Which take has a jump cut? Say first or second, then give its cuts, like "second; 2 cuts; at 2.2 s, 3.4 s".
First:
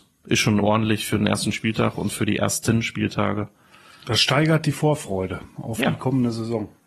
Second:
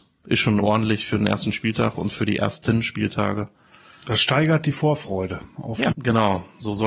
second; 1 cut; at 5.9 s